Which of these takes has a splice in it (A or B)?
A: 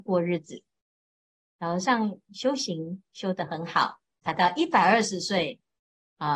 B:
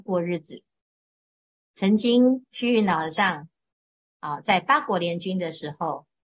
A